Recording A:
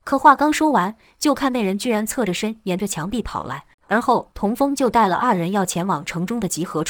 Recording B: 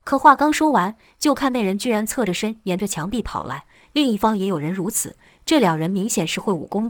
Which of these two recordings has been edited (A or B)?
A